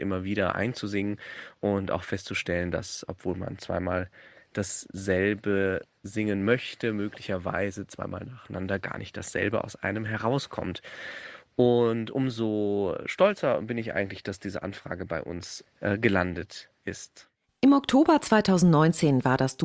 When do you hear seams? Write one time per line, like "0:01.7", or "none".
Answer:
none